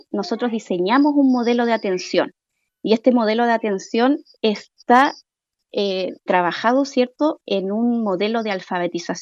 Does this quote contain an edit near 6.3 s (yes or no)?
yes